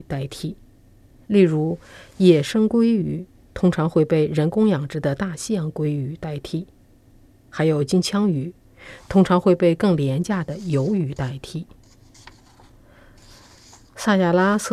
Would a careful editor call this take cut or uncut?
cut